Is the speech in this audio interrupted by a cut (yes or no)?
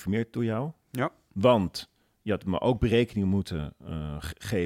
no